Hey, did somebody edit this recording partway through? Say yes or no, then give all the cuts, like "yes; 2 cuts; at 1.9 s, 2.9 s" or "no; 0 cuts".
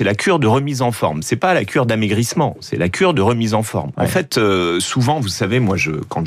yes; 1 cut; at 3.9 s